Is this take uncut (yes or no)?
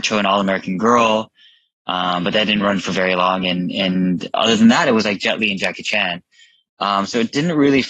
yes